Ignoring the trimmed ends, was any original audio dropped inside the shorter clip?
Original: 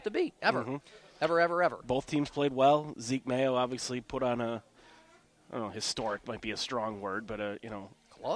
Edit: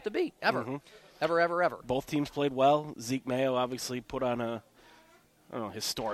no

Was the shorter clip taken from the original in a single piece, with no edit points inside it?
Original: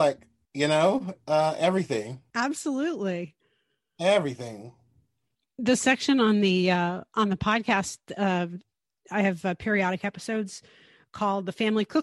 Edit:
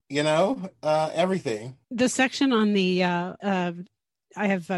no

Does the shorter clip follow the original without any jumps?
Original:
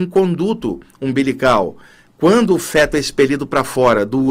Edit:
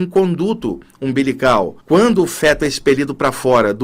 no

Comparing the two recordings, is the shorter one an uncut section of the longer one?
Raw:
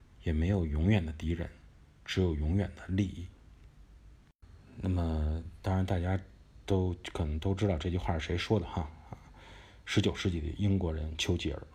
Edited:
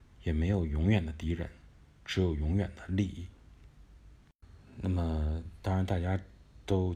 yes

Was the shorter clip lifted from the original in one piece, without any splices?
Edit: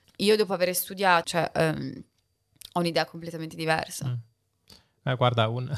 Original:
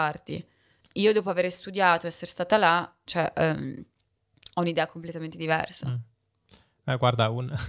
no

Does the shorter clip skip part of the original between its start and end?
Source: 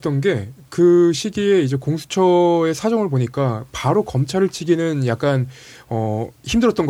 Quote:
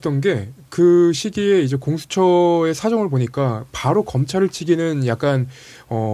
no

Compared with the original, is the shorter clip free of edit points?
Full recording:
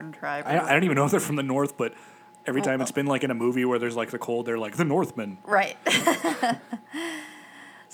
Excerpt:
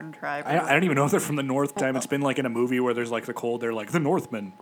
no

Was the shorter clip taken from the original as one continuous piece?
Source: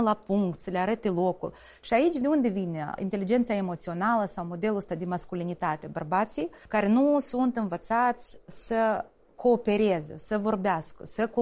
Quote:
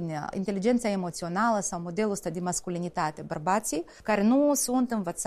yes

